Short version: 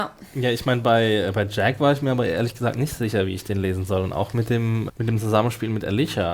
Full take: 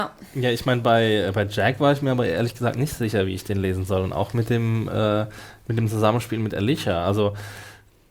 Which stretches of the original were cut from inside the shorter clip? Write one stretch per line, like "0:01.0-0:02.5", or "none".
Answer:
0:04.9-0:05.6

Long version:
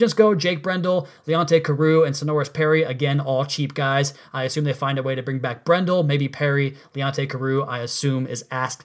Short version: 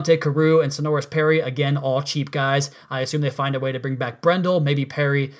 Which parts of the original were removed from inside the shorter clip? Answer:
none

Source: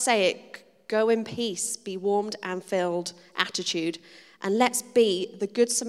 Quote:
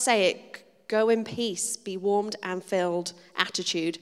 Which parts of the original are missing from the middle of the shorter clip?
none

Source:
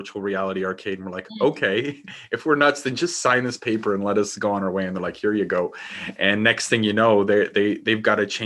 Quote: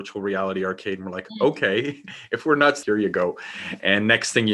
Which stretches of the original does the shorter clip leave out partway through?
0:02.8-0:05.2

